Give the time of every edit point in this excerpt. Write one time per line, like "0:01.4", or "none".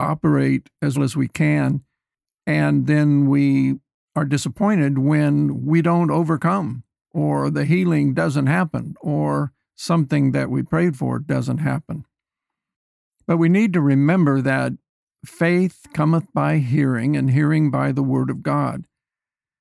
0:01.0